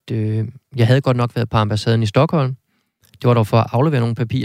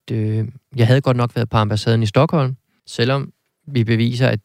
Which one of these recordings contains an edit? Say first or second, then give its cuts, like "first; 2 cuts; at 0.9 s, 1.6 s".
second; 1 cut; at 2.8 s